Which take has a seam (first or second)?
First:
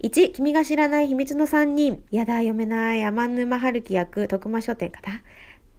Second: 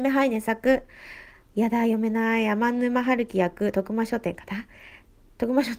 first